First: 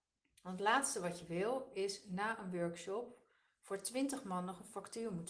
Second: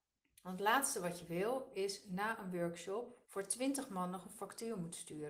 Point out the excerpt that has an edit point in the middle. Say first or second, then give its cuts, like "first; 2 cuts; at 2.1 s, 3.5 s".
second; 1 cut; at 3.2 s